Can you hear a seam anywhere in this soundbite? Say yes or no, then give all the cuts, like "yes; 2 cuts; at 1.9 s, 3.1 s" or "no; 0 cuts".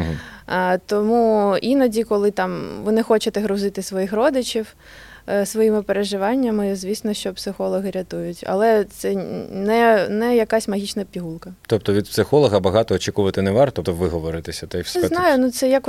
yes; 2 cuts; at 13.8 s, 14.9 s